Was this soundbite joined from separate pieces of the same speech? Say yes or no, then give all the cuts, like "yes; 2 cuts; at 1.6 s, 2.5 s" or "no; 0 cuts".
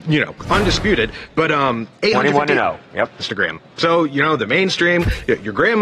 yes; 1 cut; at 3.2 s